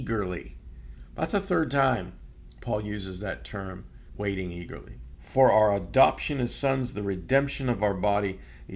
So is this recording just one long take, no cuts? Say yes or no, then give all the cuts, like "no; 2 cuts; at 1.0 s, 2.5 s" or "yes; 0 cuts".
yes; 0 cuts